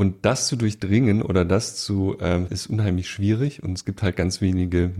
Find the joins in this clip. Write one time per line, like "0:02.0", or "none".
0:02.5

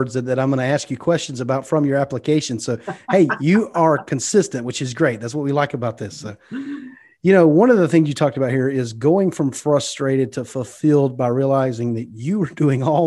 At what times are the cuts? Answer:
none

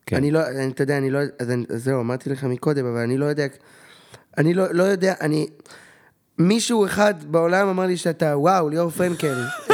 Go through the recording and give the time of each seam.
none

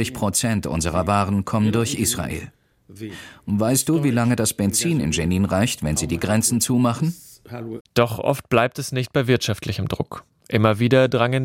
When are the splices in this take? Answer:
0:07.8

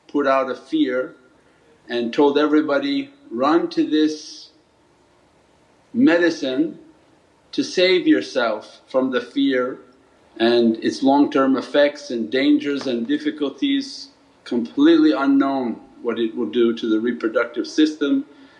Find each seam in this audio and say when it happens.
0:10.2

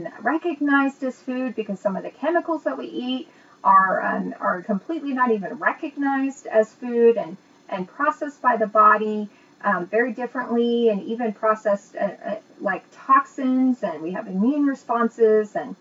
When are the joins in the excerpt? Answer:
0:04.6

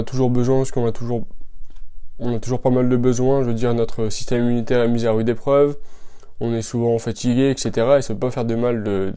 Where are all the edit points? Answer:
none

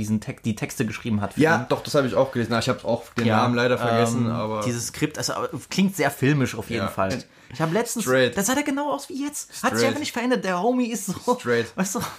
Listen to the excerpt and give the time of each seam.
0:07.1
0:08.3

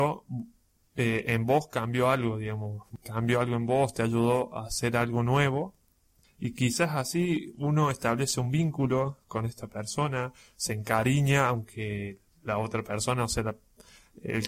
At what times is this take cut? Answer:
0:06.2

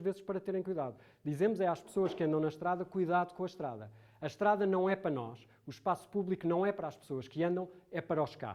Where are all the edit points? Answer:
none

